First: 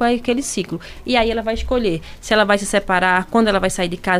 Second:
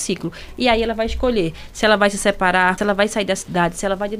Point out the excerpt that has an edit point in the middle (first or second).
second